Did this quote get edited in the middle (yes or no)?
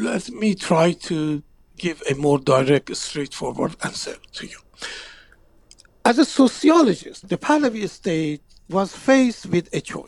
yes